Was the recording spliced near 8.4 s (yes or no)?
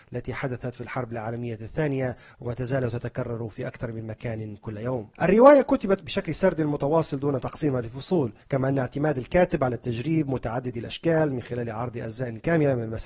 yes